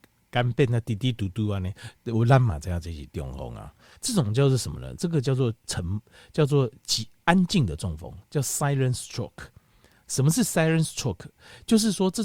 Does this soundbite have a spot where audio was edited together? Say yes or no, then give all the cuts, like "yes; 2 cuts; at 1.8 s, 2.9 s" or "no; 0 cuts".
yes; 1 cut; at 3.9 s